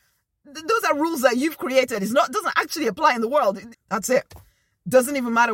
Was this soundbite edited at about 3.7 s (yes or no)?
yes